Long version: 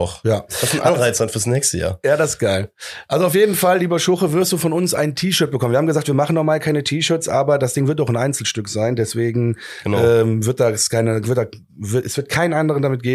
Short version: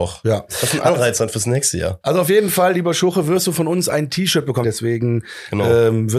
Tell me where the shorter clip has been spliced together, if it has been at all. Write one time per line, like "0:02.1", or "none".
0:02.0
0:04.6